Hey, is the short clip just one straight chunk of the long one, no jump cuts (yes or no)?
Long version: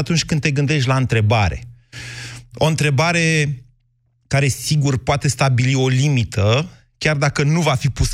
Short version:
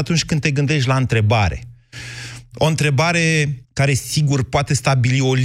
no